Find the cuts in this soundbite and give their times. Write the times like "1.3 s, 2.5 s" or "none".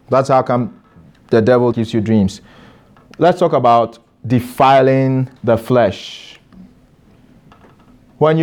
1.7 s, 5.4 s

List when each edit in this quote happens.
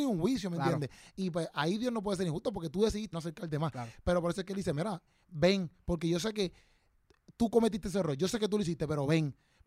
3.1 s

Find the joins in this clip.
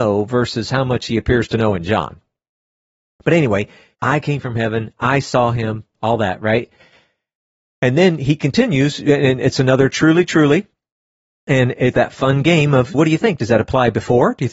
3.9 s, 11.9 s, 12.9 s

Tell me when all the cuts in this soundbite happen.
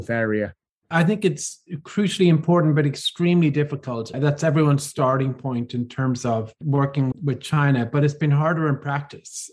4.1 s, 7.1 s

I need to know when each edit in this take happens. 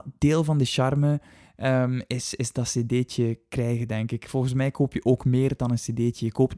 none

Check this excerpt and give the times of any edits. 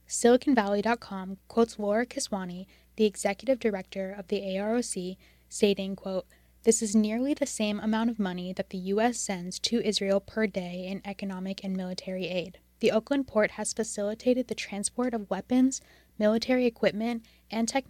none

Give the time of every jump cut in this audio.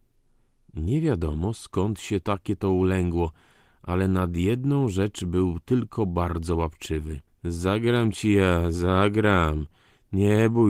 7.4 s

